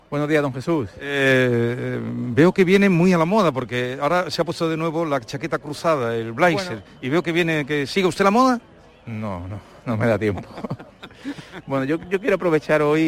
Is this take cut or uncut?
uncut